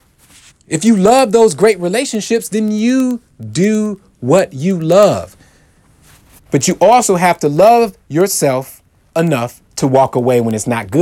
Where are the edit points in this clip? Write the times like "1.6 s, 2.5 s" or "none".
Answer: 6.5 s, 9.7 s